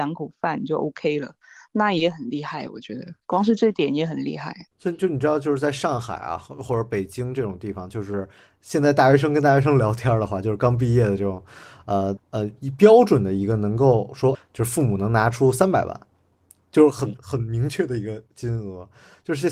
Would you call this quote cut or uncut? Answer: cut